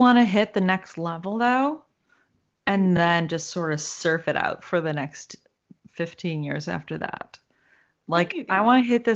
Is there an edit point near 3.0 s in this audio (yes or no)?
no